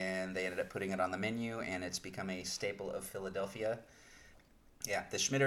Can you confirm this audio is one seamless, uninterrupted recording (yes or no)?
yes